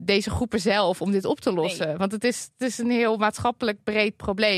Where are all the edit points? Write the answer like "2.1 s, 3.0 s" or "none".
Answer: none